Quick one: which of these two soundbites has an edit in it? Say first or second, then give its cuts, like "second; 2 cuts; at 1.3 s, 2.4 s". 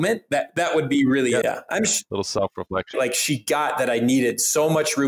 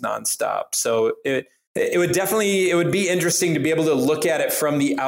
first; 2 cuts; at 1.4 s, 2.9 s